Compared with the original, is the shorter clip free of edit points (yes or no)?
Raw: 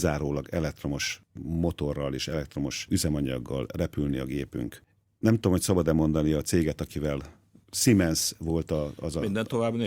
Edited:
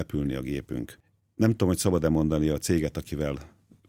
yes